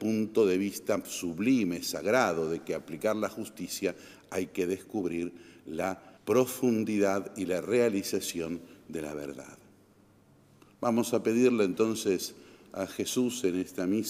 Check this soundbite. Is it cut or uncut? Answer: cut